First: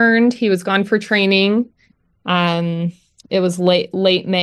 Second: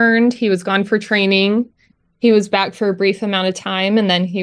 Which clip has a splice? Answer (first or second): first